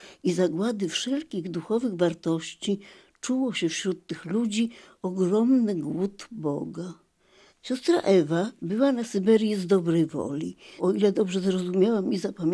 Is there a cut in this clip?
yes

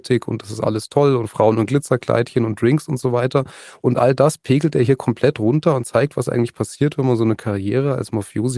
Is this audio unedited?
yes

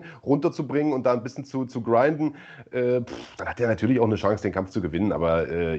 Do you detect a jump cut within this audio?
no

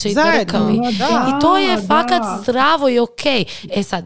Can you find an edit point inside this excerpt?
no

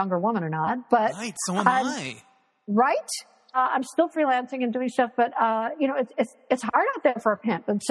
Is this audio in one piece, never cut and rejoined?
no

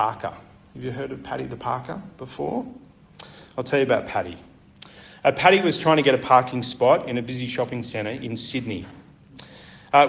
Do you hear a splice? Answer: no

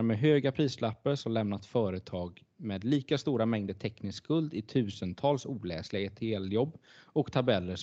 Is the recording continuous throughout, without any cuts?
yes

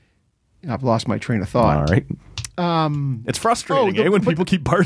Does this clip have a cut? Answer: no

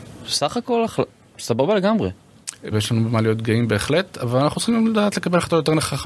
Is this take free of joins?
no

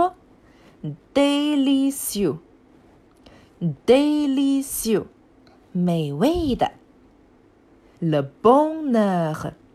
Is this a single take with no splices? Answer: no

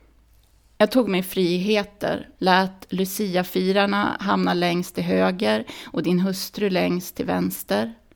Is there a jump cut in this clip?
yes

